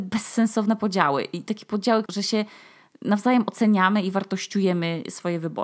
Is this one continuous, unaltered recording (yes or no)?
no